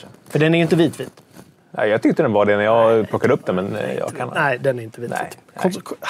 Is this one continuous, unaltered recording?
yes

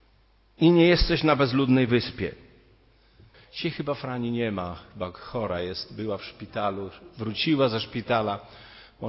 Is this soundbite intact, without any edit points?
no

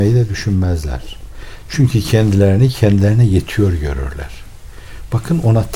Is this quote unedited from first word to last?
yes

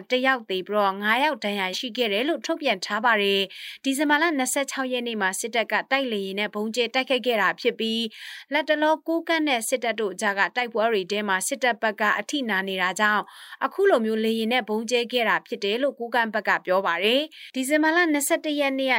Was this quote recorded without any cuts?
no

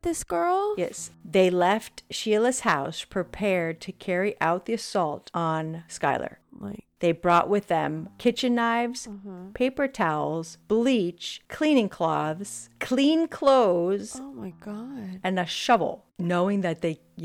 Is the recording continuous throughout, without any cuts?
no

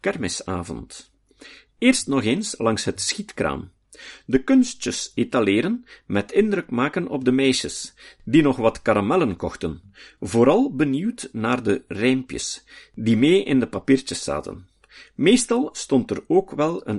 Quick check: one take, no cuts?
yes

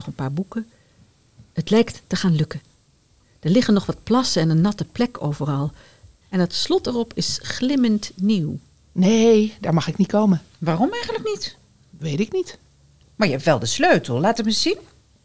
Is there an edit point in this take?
yes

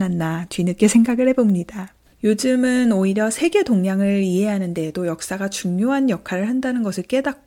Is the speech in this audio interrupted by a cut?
no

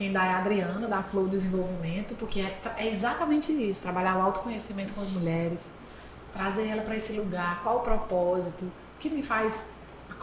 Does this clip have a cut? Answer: no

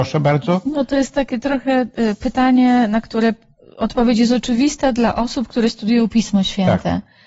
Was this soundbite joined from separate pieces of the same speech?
no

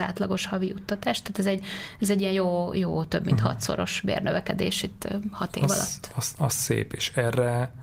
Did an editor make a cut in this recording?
no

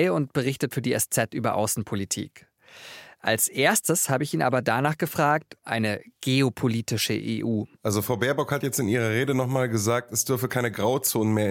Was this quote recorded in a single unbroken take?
no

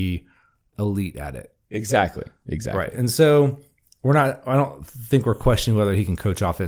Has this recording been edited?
no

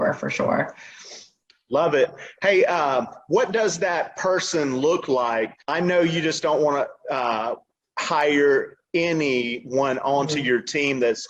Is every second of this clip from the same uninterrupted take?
yes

